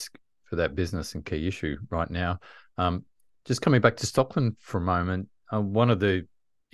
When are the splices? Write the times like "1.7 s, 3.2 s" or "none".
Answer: none